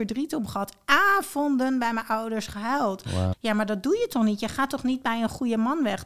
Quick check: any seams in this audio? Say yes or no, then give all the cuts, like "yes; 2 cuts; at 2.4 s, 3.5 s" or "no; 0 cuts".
yes; 1 cut; at 3.3 s